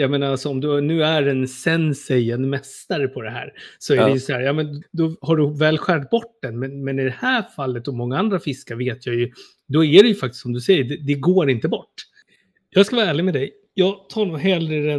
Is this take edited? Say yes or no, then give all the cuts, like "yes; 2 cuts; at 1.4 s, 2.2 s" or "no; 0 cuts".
yes; 1 cut; at 4.8 s